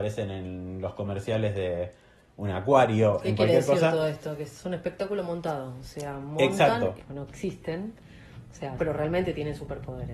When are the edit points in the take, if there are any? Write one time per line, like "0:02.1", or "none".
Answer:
0:07.0
0:08.8

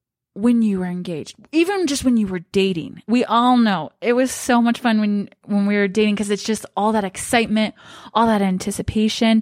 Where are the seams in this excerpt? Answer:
none

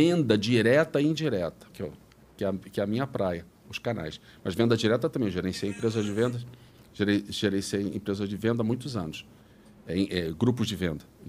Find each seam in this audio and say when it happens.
0:01.7

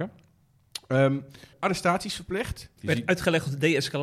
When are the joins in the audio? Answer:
0:01.5
0:02.8

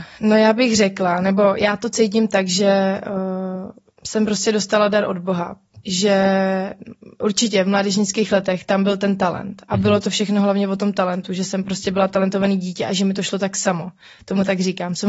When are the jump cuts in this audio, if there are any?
none

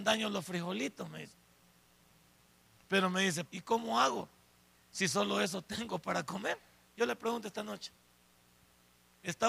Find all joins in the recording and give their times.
0:03.5
0:06.9

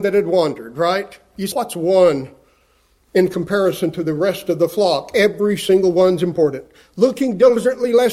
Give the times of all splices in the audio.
0:01.5

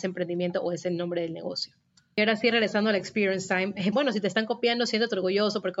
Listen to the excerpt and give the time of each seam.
0:03.9

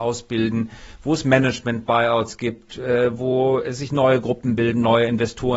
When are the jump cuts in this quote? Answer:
none

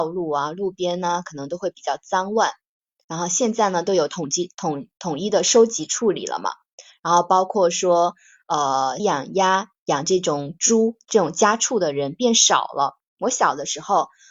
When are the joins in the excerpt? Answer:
0:09.0

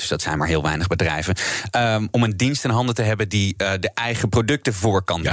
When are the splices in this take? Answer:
none

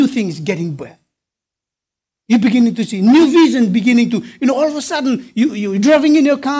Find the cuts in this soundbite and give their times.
none

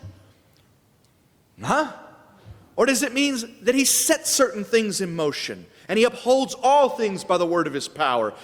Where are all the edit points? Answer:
none

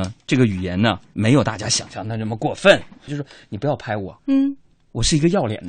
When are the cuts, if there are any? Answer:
0:03.1
0:04.2

